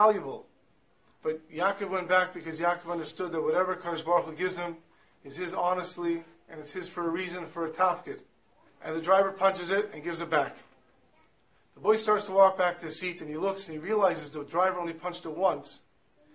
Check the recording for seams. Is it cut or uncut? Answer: cut